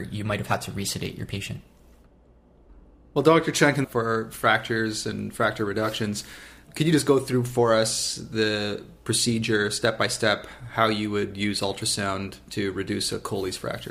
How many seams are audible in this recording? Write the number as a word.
one